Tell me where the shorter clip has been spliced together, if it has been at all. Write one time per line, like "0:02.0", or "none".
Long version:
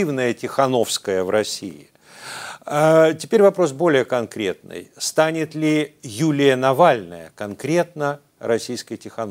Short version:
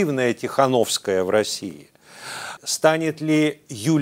0:02.6